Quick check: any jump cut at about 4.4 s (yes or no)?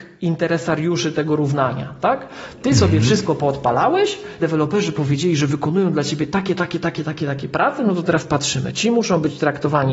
yes